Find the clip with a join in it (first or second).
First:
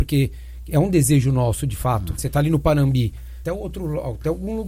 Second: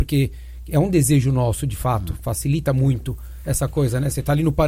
first